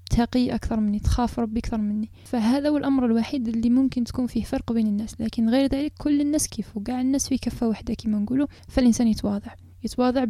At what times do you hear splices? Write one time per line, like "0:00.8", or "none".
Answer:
0:06.5